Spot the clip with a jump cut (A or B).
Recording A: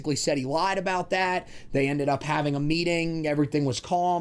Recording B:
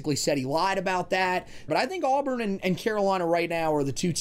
B